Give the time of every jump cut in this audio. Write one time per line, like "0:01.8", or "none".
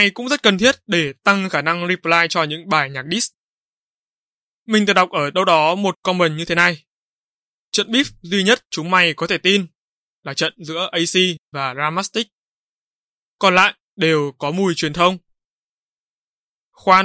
none